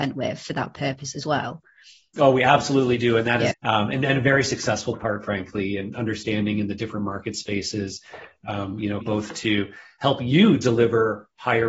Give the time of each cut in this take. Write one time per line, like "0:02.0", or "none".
0:03.5
0:09.0